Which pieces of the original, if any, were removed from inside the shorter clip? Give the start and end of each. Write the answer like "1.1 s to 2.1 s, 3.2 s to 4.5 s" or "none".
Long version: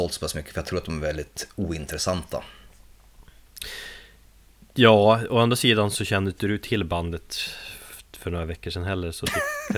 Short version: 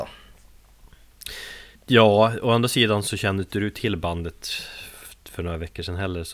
4.1 s to 4.6 s